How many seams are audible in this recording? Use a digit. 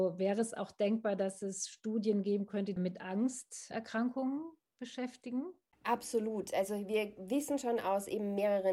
1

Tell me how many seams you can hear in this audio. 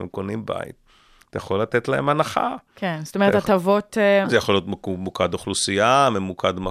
1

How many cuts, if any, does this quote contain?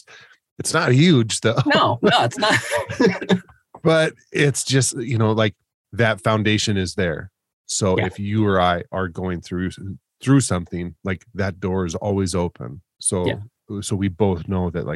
0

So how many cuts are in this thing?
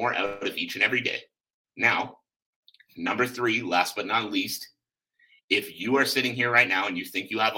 1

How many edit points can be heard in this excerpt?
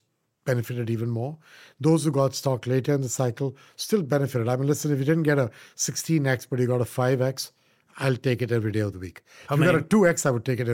0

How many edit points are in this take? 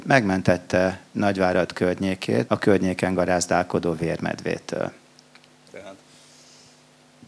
2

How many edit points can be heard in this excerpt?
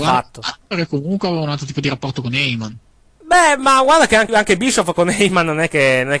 2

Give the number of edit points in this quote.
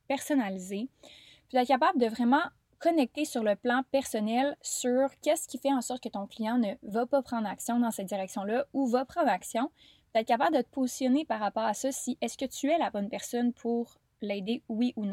0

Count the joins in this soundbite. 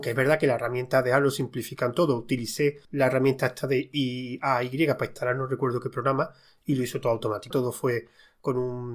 2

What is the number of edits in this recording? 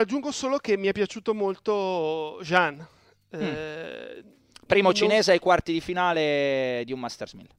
0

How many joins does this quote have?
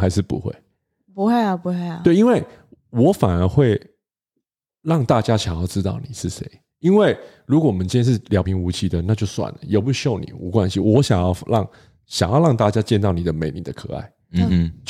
1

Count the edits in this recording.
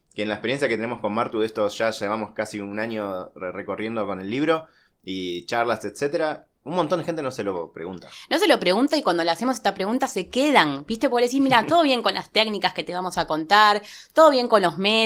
0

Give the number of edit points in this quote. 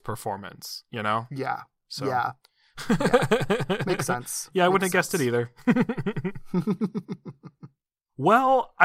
0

